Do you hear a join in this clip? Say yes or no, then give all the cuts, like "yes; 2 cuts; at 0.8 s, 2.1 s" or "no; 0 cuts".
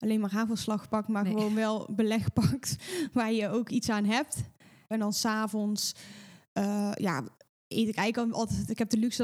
yes; 1 cut; at 4.9 s